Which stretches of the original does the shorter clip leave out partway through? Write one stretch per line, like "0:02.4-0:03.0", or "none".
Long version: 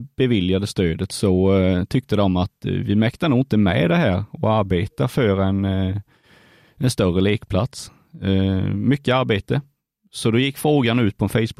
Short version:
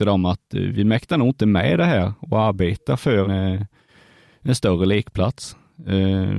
0:05.4-0:05.6